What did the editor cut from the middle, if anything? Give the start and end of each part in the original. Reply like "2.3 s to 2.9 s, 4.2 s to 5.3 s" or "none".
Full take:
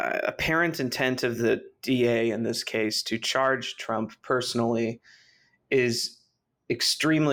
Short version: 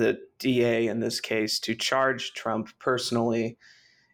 none